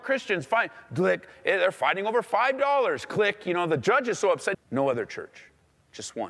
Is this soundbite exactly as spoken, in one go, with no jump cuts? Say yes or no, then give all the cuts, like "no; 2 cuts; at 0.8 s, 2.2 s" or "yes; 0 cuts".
no; 1 cut; at 4.5 s